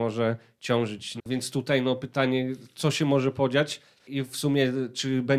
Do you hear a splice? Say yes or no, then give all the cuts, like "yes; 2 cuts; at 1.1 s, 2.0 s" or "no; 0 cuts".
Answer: yes; 2 cuts; at 1.2 s, 4.0 s